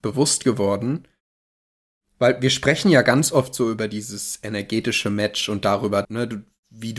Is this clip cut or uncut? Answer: cut